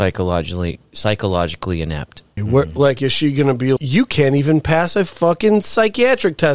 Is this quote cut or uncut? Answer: cut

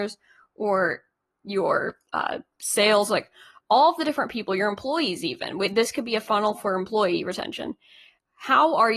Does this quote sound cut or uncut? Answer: uncut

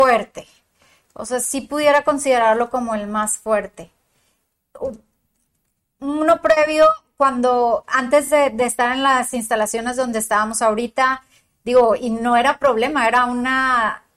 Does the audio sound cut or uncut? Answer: uncut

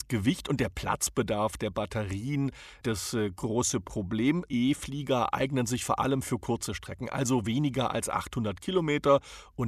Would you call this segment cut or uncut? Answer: cut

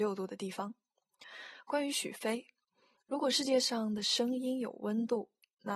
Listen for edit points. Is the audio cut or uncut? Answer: uncut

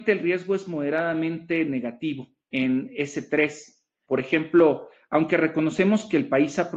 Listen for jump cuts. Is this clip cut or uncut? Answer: cut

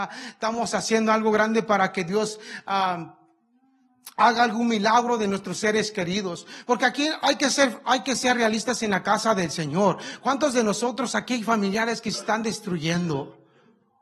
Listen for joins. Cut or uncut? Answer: uncut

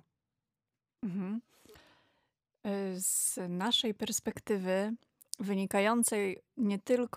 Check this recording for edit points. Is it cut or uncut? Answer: uncut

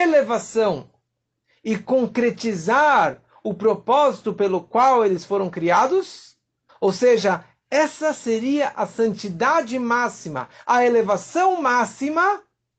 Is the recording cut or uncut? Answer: cut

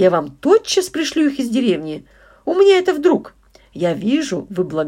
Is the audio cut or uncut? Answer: uncut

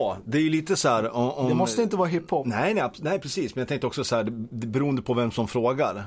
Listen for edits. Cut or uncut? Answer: uncut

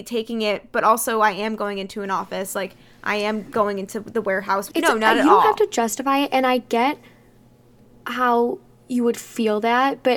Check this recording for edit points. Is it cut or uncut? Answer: cut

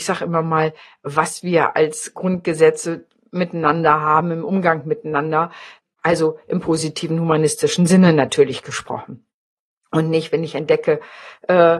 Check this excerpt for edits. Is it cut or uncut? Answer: uncut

